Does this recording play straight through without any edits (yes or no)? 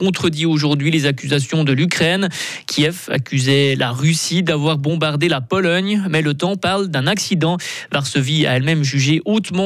yes